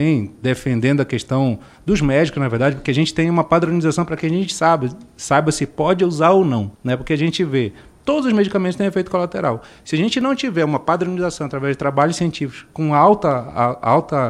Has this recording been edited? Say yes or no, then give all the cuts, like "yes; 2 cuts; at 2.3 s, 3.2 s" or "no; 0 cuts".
yes; 1 cut; at 6.7 s